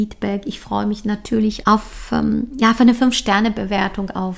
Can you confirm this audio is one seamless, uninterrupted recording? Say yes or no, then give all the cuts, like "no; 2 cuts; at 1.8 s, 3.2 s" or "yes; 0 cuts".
no; 1 cut; at 1.6 s